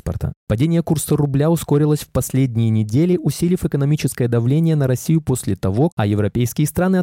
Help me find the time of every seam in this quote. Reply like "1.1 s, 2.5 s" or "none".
5.9 s